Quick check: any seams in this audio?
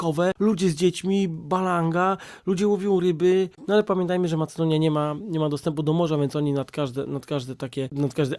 yes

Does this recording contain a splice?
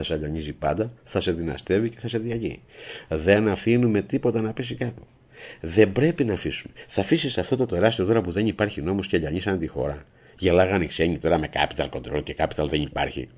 no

